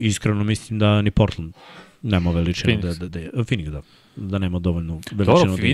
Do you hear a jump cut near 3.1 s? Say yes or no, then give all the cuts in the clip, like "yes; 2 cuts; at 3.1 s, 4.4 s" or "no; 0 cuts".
yes; 1 cut; at 3.1 s